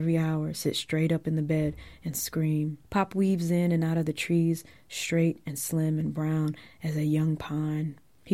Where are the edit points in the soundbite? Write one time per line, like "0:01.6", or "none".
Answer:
0:02.8